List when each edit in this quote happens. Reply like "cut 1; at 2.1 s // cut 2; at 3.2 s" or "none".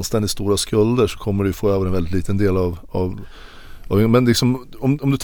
none